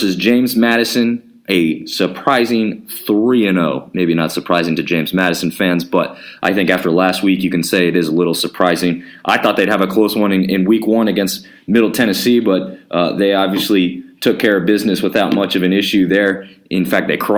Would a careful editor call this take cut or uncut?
uncut